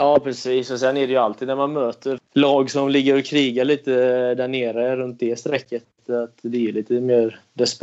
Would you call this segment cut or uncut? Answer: cut